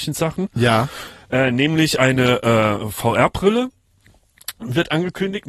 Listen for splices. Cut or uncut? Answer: uncut